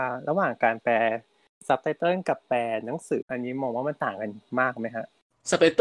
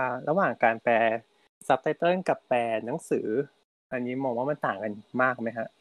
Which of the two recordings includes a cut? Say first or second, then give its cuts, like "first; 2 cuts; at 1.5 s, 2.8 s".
first; 1 cut; at 3.2 s